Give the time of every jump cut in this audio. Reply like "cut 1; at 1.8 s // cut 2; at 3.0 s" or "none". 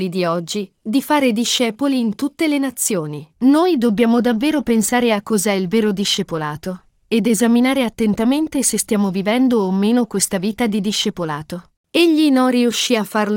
cut 1; at 3.3 s // cut 2; at 11.8 s